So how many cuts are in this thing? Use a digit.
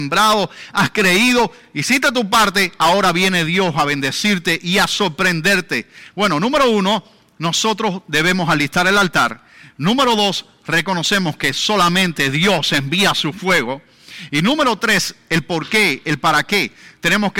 1